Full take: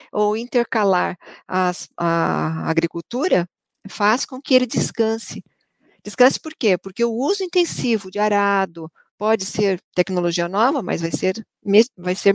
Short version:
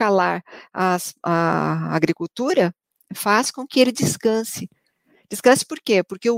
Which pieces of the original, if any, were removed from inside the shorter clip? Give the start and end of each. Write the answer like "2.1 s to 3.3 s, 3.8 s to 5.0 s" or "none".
none